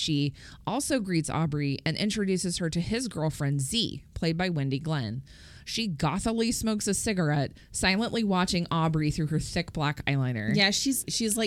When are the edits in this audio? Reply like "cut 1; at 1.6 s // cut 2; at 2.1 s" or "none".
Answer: none